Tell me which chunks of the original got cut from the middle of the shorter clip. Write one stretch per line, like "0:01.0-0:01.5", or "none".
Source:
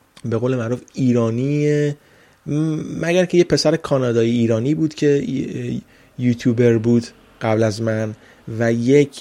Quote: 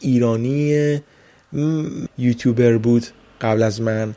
0:03.0-0:06.1